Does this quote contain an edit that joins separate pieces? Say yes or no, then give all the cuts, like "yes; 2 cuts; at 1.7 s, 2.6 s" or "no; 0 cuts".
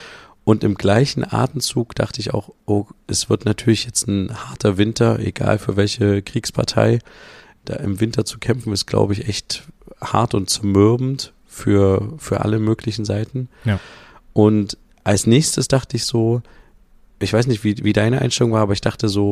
no; 0 cuts